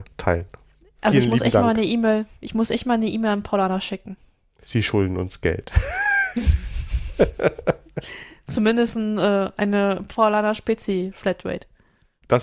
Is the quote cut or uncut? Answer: uncut